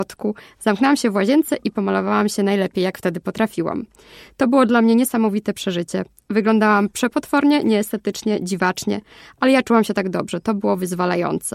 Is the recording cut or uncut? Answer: uncut